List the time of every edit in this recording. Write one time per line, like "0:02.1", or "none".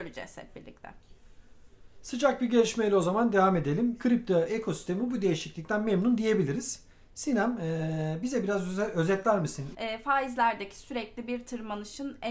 0:04.0
0:09.7